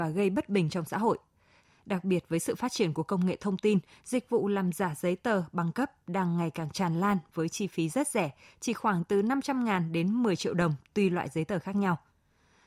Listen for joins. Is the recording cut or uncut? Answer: uncut